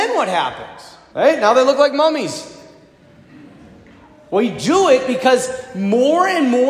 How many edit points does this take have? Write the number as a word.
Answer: one